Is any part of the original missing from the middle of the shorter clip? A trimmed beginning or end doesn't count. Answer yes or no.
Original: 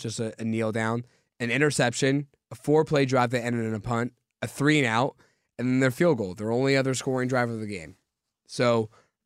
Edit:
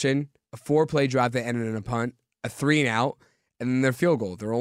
no